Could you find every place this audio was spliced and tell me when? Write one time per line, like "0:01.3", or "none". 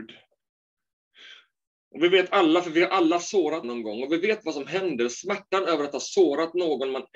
0:03.6